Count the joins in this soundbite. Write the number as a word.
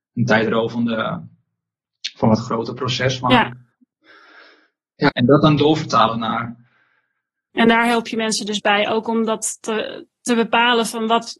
two